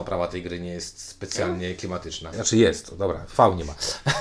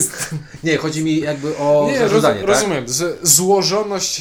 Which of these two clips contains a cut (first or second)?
first